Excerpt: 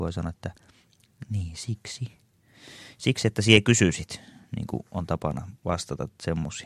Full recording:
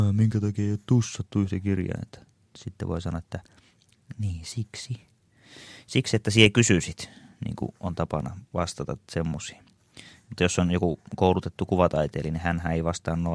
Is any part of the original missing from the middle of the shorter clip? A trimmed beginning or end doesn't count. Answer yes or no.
no